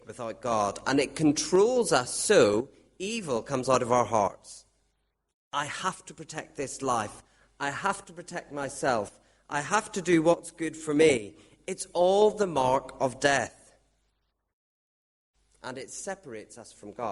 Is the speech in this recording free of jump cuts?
yes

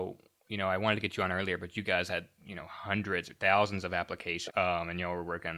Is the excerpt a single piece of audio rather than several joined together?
no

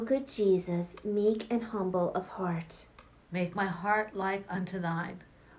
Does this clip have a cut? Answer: no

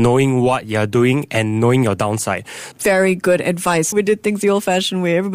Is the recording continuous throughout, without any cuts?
no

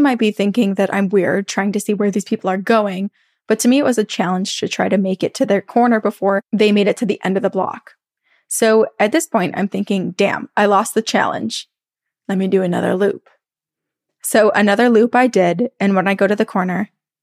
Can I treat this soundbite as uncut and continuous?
yes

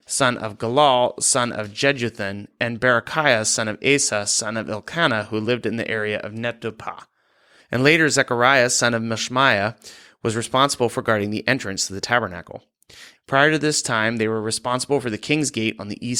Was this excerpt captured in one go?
no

